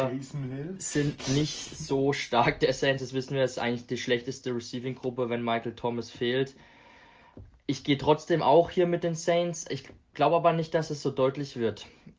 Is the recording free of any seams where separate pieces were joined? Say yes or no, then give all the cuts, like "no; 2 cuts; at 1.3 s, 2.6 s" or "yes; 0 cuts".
yes; 0 cuts